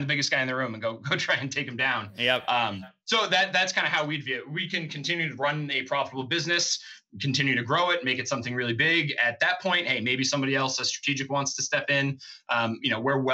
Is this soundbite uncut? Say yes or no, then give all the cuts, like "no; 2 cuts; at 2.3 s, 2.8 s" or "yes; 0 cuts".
yes; 0 cuts